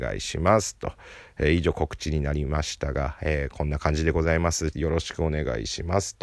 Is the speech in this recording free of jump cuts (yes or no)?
no